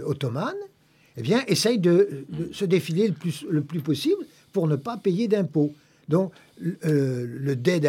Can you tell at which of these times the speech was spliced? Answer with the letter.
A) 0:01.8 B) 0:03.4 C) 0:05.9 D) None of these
D